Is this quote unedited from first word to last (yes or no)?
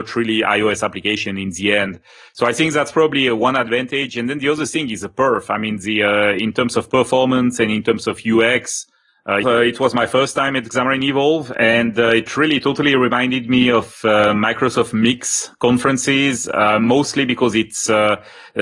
no